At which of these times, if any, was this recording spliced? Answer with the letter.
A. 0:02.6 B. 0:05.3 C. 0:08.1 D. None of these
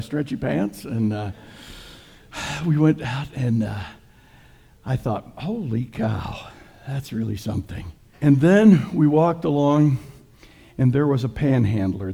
C